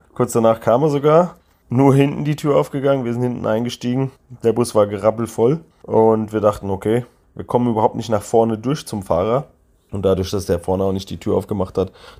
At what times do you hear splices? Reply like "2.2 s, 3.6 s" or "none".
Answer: 5.7 s